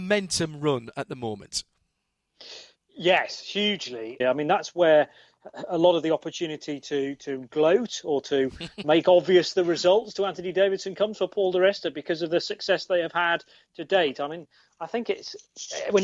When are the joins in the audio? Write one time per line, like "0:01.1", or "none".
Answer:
0:04.2
0:08.8